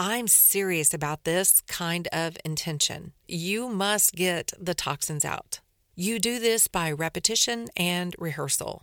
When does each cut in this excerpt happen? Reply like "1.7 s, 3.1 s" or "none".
3.2 s, 5.9 s